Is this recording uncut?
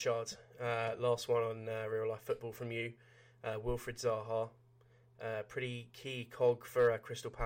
yes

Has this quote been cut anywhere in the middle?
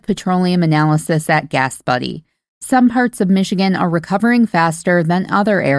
no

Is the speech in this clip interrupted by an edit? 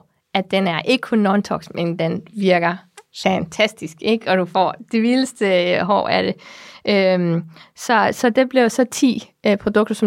no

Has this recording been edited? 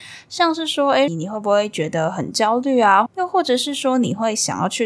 yes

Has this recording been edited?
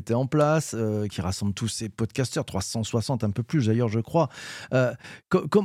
no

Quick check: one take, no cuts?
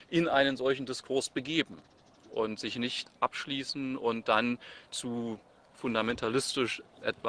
yes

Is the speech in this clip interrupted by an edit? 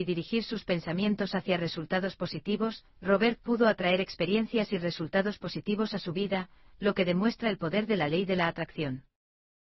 no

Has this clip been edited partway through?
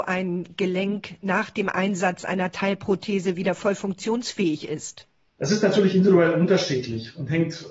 no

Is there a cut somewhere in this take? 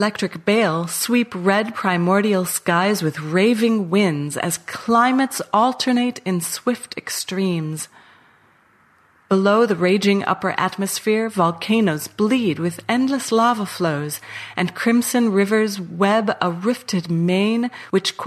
no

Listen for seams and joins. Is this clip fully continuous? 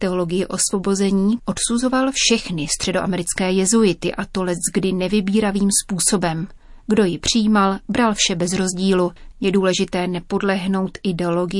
no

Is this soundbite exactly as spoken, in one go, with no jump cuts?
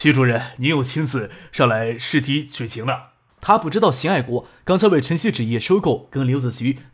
no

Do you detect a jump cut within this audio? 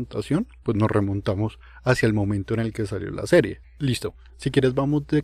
yes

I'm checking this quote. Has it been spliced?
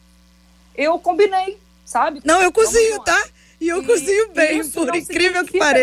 yes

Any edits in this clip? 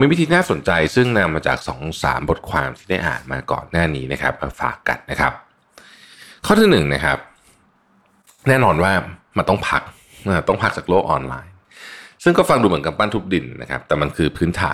no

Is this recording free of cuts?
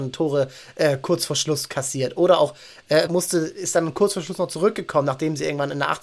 no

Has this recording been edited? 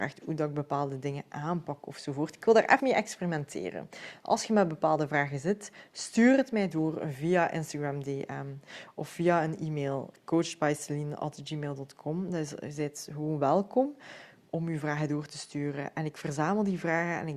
yes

